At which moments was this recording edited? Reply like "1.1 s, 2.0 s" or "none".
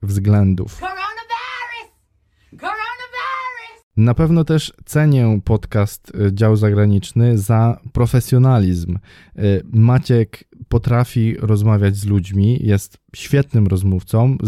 none

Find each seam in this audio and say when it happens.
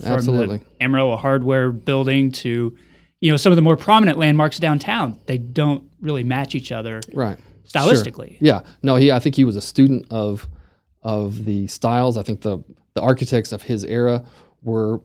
none

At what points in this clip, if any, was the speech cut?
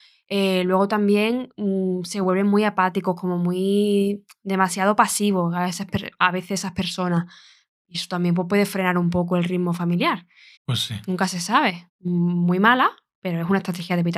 10.6 s, 11.9 s

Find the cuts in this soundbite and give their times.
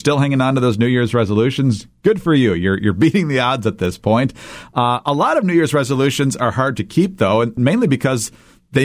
none

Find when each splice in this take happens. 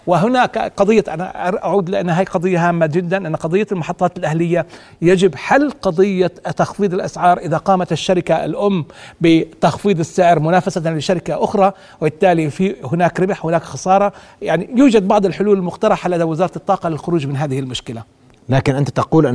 none

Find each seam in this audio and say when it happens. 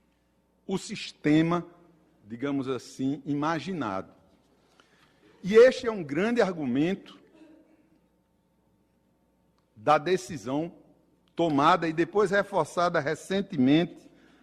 none

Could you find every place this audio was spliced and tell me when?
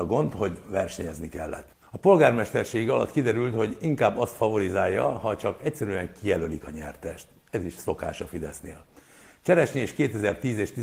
1.8 s

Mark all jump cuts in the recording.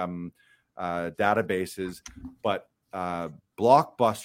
none

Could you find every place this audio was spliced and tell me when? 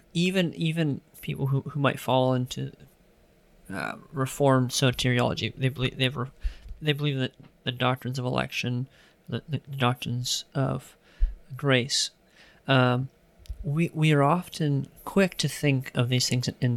none

